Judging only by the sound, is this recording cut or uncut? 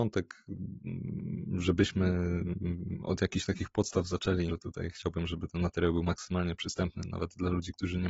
cut